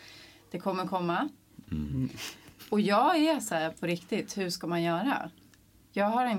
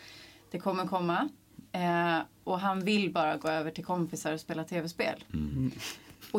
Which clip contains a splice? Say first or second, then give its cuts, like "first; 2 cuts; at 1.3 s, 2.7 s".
first; 1 cut; at 1.6 s